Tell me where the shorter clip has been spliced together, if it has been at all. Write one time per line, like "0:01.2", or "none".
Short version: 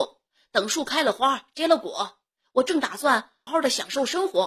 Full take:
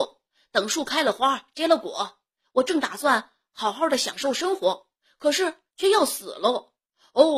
0:03.5